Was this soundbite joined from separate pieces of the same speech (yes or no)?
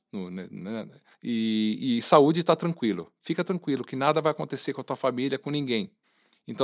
no